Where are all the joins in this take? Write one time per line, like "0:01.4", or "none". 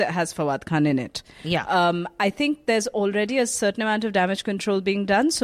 none